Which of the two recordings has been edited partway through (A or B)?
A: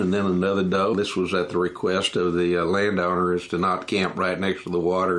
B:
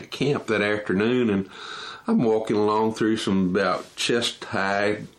A